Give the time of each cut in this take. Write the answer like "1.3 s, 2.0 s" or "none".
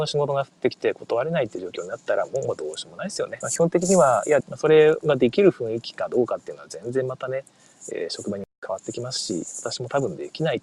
3.4 s, 4.4 s